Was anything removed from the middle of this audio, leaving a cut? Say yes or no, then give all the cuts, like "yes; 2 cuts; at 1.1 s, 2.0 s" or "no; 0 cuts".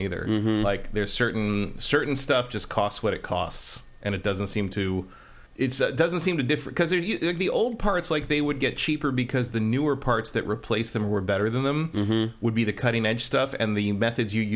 yes; 1 cut; at 5.5 s